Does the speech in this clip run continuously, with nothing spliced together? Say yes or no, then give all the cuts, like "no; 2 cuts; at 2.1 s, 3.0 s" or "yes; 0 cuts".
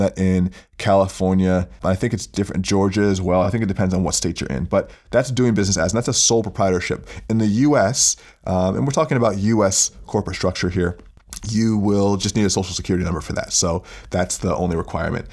yes; 0 cuts